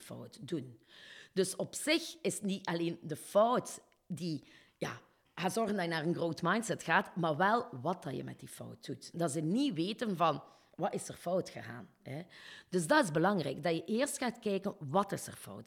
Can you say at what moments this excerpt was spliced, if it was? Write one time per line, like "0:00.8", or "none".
0:09.1